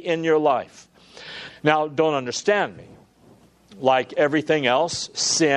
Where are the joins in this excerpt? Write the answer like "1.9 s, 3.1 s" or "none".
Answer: 1.5 s